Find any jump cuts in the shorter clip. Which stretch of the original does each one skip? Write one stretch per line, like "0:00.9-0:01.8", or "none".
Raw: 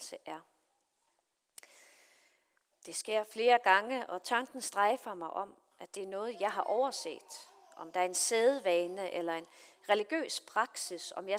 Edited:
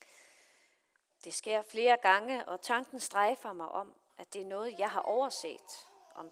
none